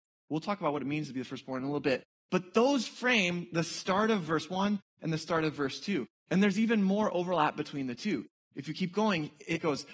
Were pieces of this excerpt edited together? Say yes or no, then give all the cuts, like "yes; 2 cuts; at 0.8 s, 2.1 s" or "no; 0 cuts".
no; 0 cuts